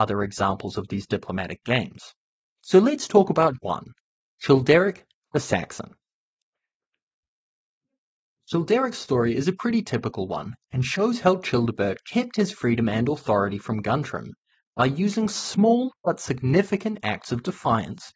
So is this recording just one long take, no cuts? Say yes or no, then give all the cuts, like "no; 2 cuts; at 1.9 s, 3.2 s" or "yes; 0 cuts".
no; 1 cut; at 3.6 s